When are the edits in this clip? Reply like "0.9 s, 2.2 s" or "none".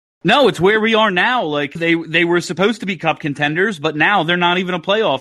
1.8 s

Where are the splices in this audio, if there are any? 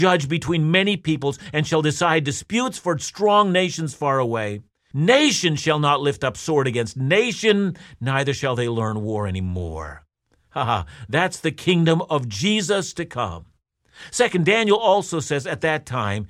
4.9 s

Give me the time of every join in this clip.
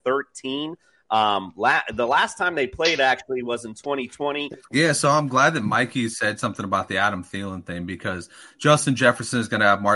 4.6 s

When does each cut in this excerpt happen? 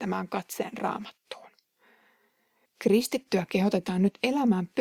2.7 s

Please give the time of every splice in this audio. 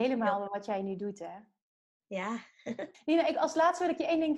2.9 s

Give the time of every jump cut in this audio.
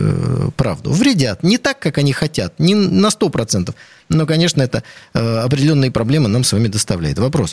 none

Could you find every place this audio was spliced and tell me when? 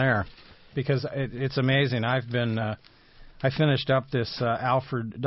none

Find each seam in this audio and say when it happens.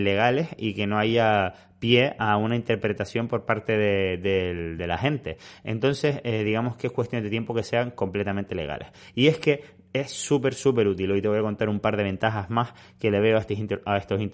none

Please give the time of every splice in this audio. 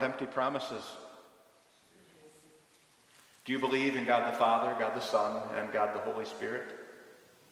none

